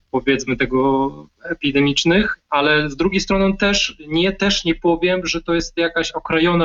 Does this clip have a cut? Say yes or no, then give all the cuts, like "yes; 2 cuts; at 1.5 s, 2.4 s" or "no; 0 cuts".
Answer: no; 0 cuts